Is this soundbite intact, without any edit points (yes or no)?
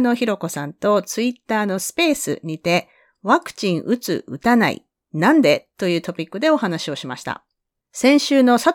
no